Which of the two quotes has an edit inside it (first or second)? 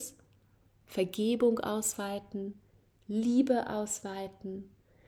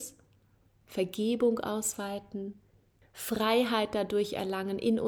second